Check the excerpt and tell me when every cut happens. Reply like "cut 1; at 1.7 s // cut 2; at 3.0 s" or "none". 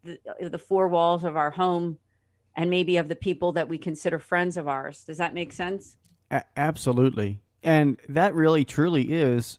none